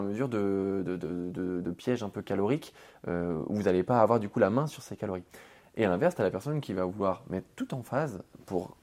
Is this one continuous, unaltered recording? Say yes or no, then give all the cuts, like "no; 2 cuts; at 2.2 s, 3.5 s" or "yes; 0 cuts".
yes; 0 cuts